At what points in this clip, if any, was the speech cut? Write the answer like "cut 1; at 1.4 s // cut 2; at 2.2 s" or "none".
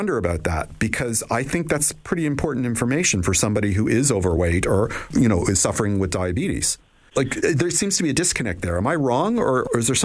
none